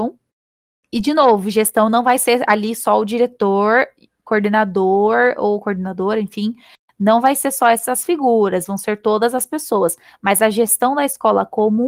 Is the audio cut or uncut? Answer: uncut